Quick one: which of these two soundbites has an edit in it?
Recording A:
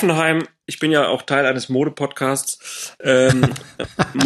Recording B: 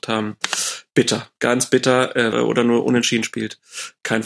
B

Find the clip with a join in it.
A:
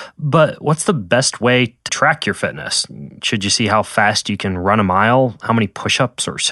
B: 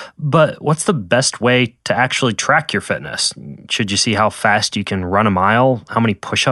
A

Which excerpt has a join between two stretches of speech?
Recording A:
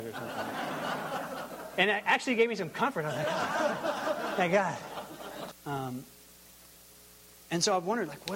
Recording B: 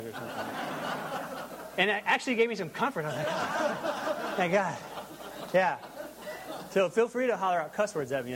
A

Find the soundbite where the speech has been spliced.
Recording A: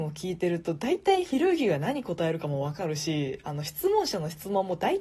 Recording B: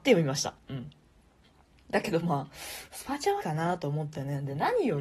B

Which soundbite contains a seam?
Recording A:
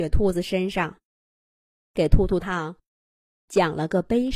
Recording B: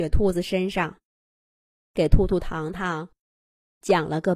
A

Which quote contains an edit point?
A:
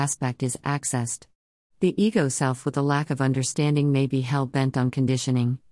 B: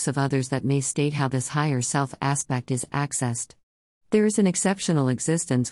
A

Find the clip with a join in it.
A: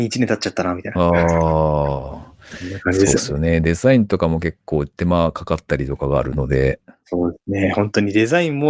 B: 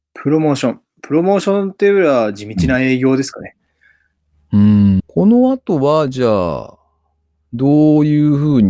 B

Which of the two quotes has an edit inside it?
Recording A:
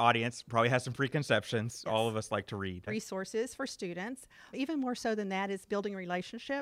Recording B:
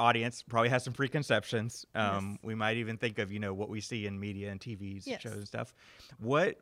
A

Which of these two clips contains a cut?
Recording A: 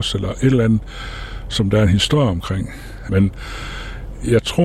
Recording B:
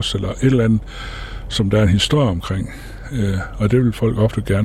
A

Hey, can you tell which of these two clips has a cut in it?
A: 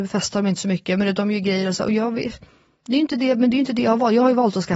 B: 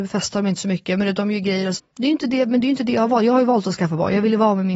B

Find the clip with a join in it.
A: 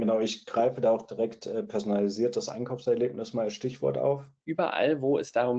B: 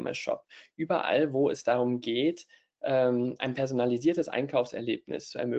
A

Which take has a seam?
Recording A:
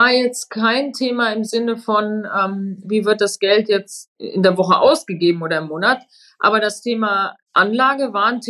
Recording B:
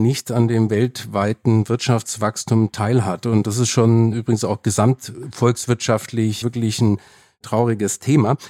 B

